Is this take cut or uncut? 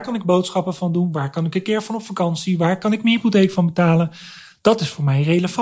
uncut